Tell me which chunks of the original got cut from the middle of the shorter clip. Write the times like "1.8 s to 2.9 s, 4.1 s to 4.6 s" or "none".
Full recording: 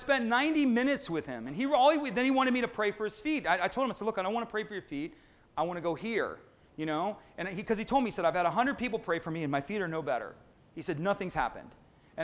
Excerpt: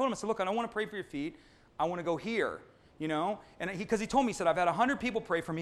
none